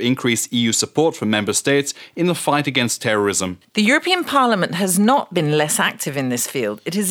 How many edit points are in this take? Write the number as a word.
zero